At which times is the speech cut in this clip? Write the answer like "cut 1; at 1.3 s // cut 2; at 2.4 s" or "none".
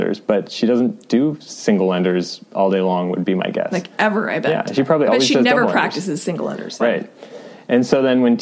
cut 1; at 6.8 s